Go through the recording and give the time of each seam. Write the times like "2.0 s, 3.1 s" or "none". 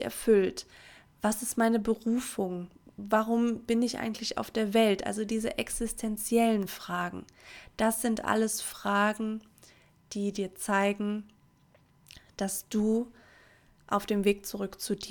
none